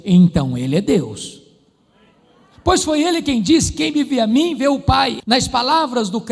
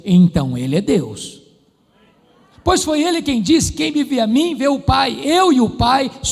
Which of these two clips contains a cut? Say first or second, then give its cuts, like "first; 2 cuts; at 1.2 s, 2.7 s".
first; 1 cut; at 5.2 s